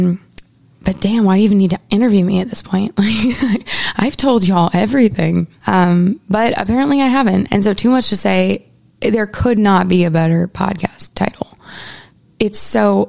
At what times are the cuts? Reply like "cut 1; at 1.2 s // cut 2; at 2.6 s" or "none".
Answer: cut 1; at 7.4 s